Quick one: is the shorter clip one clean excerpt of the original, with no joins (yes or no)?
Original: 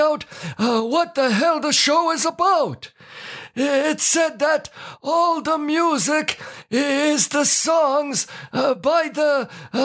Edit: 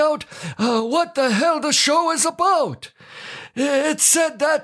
yes